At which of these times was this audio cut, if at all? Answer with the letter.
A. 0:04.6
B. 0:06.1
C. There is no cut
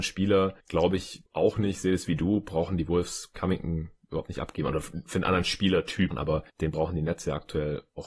B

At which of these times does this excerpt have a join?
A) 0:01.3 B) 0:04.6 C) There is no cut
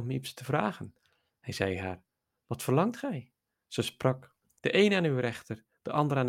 B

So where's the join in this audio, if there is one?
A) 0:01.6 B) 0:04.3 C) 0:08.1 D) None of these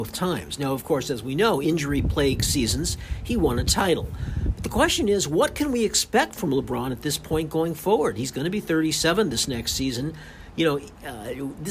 A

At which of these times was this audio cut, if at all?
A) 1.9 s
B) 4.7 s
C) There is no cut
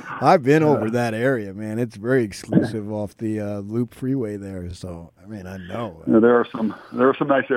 C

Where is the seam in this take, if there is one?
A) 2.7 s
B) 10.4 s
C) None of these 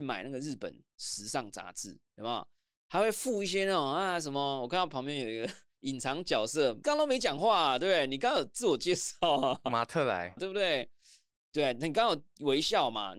B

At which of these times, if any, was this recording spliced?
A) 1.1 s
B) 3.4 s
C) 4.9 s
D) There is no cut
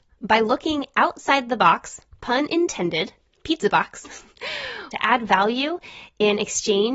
C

